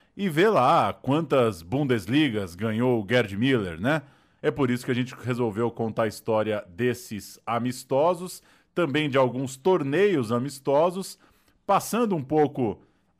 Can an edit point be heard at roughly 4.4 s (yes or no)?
yes